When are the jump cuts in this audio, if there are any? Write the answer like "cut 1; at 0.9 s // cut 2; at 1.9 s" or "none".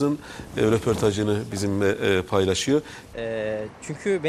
cut 1; at 3.1 s

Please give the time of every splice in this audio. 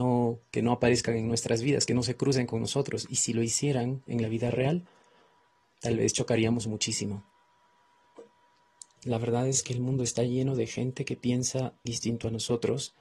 cut 1; at 5.6 s // cut 2; at 9.0 s // cut 3; at 11.9 s

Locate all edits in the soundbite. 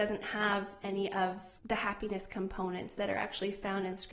cut 1; at 1.6 s

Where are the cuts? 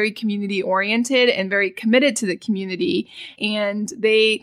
cut 1; at 3.4 s

